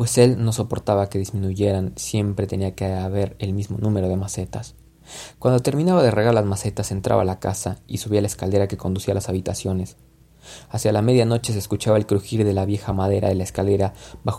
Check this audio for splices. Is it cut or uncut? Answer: uncut